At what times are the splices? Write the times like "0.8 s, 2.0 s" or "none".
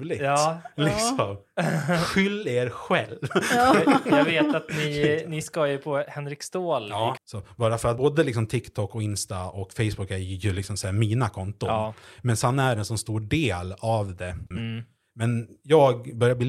7.2 s, 14.5 s